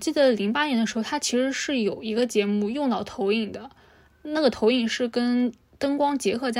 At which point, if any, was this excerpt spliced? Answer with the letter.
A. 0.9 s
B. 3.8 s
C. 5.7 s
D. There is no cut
D